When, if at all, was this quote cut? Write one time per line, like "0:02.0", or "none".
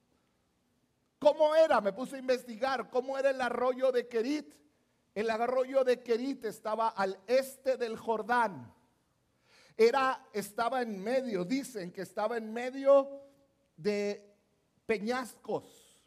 none